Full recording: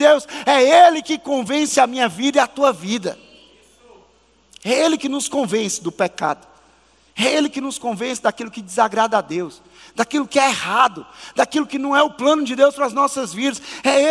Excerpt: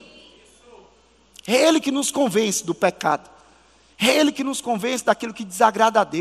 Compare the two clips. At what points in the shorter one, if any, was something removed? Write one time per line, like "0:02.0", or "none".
none